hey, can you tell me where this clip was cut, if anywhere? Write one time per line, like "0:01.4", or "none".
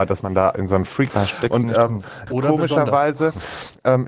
0:01.1
0:02.3